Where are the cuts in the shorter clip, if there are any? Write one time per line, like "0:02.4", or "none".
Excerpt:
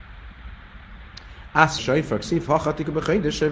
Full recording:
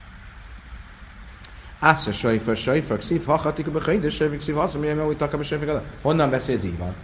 0:01.8